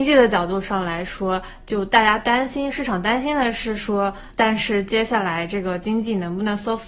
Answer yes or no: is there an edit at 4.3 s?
yes